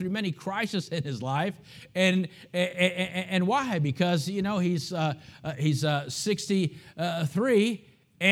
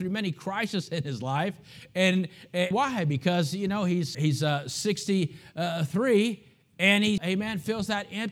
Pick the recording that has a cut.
second; 3 cuts; at 2.7 s, 4.1 s, 7.2 s

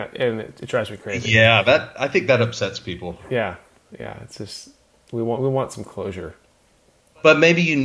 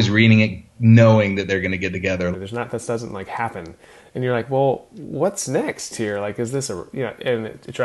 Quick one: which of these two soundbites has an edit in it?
second; 1 cut; at 2.3 s

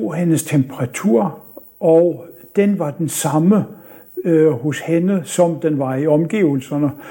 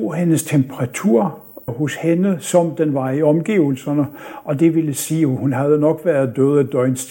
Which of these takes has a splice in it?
second; 1 cut; at 1.7 s

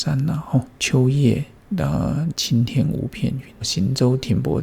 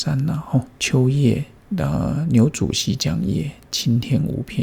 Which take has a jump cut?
first; 2 cuts; at 2.3 s, 3.6 s

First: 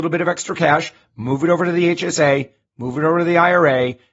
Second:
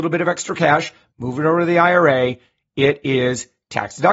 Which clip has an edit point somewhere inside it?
second; 1 cut; at 1.1 s

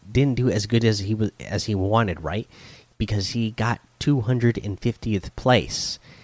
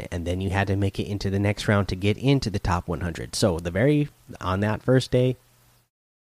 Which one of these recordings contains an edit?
second; 1 cut; at 4.4 s

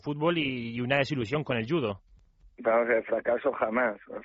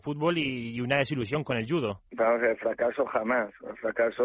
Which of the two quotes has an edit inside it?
second; 1 cut; at 2.1 s

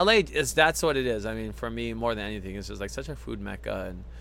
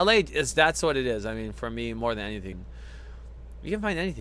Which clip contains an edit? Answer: second; 1 cut; at 2.5 s

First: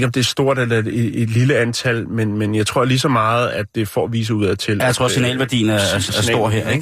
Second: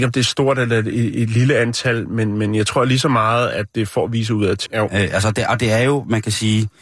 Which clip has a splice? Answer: second; 1 cut; at 4.7 s

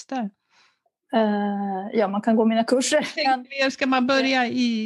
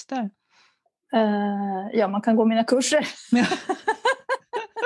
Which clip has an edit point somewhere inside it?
first; 1 cut; at 3.2 s

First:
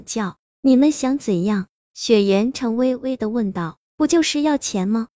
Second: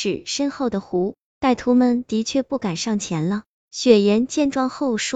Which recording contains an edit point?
first; 1 cut; at 2.5 s

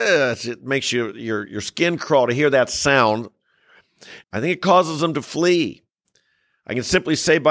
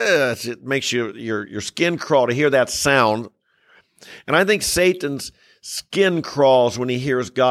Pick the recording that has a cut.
first; 1 cut; at 4.2 s

